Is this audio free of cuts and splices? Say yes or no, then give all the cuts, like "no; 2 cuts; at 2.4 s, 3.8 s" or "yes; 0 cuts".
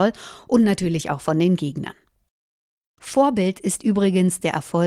no; 1 cut; at 3.0 s